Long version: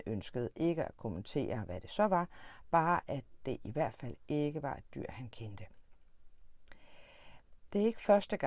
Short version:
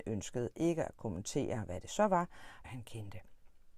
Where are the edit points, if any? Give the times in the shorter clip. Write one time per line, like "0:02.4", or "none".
0:02.6